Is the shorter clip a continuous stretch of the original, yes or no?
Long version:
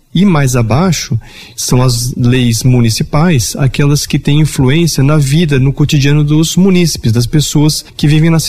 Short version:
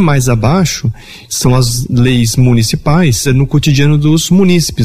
no